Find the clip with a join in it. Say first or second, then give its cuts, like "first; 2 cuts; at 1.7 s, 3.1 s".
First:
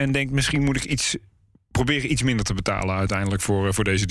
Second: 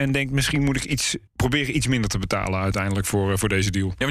second; 1 cut; at 1.3 s